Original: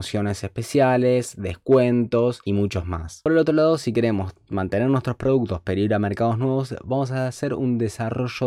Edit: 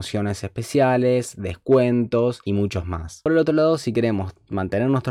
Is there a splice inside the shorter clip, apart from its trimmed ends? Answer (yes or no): no